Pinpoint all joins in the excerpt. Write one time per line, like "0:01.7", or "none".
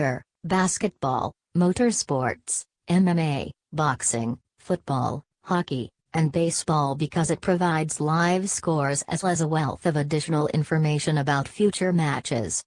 0:09.2

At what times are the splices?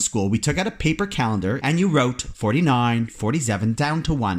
0:01.6
0:03.1

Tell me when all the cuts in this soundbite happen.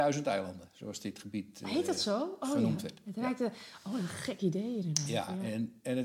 none

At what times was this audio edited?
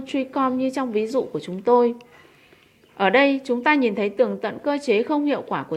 none

